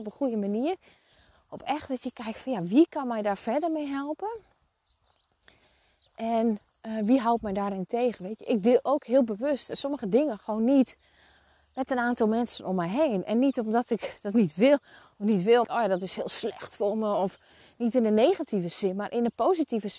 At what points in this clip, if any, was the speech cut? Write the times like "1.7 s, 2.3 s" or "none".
15.6 s